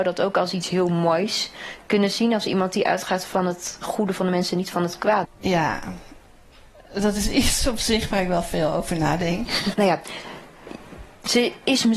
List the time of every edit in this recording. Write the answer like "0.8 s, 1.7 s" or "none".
5.2 s, 9.7 s